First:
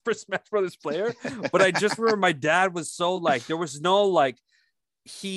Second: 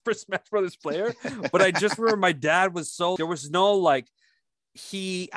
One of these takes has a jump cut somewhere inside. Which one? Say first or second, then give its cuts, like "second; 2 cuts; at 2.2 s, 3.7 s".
second; 1 cut; at 3.2 s